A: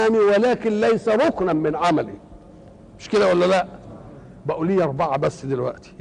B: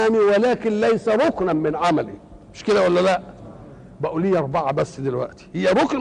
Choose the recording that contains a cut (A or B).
B